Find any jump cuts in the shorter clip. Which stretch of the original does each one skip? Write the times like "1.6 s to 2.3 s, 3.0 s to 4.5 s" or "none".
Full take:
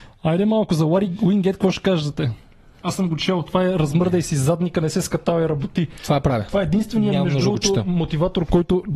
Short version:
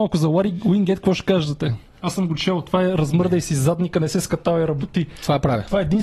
2.5 s to 2.7 s